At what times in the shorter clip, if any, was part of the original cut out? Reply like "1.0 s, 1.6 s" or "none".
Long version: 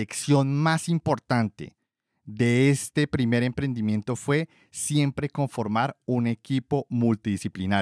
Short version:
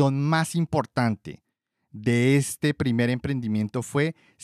none